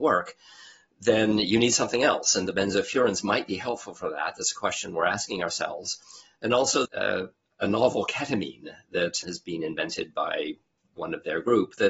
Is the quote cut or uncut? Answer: cut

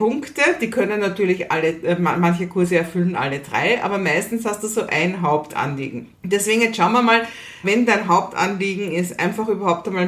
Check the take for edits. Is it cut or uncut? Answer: cut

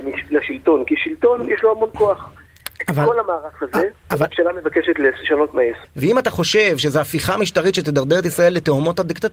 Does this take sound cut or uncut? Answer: cut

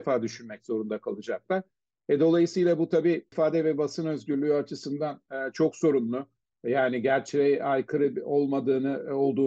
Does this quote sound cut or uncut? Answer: uncut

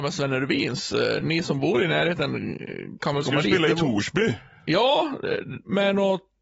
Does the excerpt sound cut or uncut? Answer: uncut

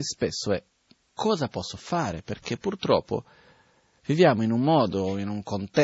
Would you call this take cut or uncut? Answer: uncut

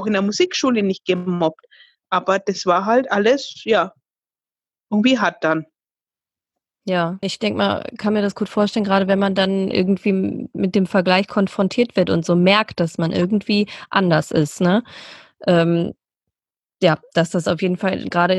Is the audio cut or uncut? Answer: cut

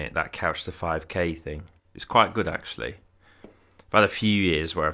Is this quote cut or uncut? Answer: uncut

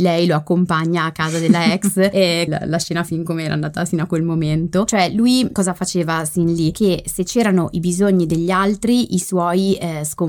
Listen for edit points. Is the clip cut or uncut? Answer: cut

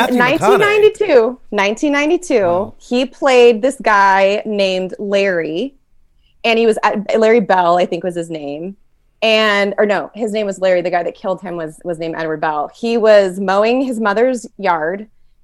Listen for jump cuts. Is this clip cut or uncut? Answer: uncut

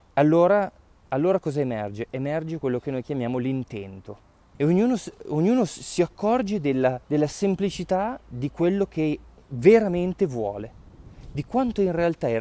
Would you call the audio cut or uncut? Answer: cut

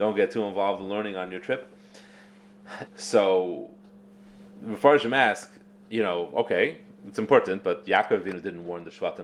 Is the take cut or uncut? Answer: cut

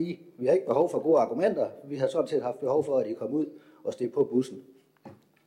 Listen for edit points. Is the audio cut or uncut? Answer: uncut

